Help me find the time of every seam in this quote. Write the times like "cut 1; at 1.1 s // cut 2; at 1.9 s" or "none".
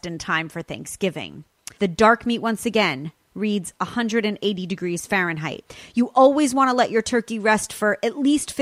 cut 1; at 1.7 s